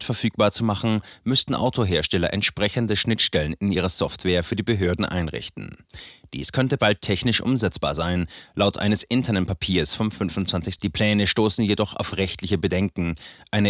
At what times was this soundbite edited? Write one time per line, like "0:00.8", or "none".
0:10.8